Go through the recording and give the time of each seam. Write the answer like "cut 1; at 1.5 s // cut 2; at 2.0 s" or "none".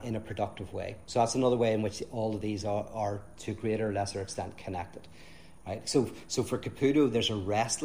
none